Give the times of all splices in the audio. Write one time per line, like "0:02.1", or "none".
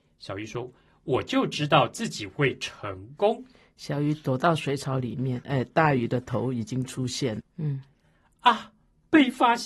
0:05.4
0:07.4